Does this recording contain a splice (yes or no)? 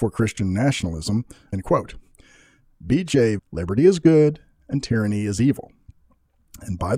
yes